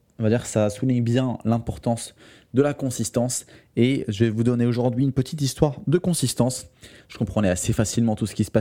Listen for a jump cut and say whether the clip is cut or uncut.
cut